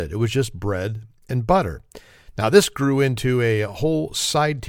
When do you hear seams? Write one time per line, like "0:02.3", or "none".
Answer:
none